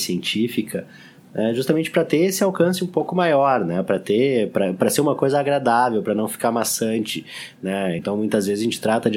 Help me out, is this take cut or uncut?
uncut